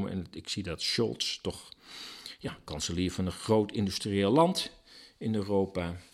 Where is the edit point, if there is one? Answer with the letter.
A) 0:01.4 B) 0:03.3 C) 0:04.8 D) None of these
D